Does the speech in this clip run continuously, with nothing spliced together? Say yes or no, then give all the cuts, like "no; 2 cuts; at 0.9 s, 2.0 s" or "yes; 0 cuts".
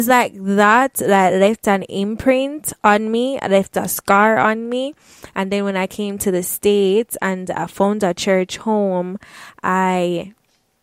yes; 0 cuts